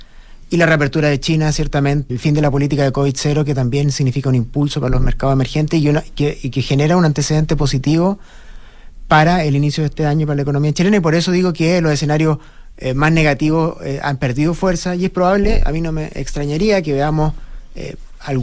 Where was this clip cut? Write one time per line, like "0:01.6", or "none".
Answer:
0:02.1